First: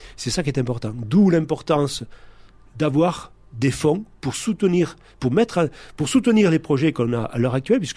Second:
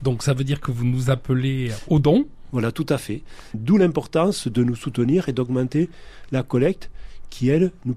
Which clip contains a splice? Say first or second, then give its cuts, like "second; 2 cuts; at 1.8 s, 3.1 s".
second; 1 cut; at 3.5 s